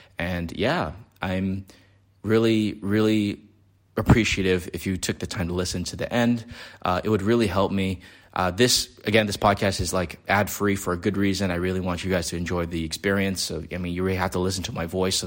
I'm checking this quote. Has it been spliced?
no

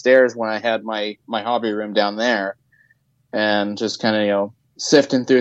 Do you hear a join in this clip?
no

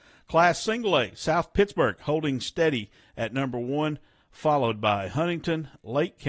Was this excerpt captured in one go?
yes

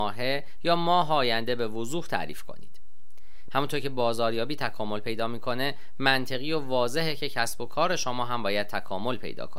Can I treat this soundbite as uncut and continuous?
no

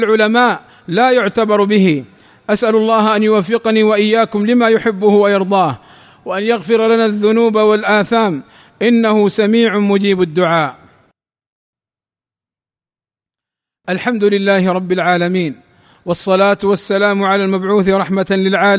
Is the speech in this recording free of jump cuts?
yes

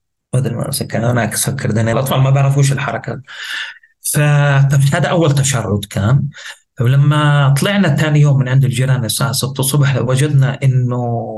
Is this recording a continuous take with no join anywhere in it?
no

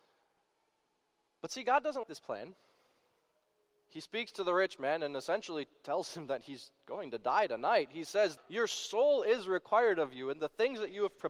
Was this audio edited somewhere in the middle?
yes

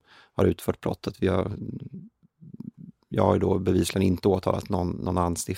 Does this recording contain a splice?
no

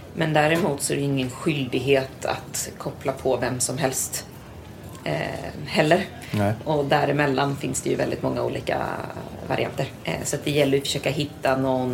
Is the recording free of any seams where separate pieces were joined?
no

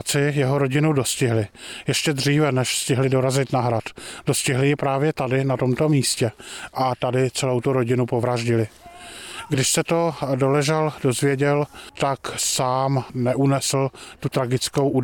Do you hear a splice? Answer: no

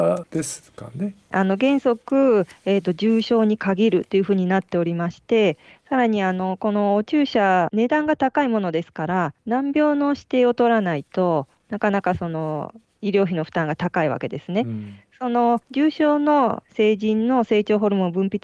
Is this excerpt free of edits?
no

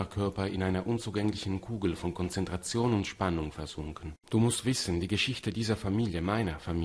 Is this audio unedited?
no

